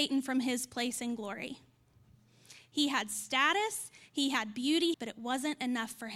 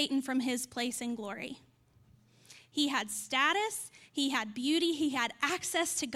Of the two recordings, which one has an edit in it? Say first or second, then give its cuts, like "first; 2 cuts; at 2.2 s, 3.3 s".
first; 1 cut; at 4.9 s